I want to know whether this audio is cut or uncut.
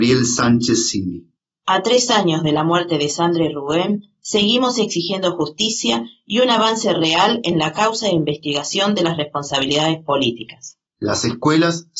cut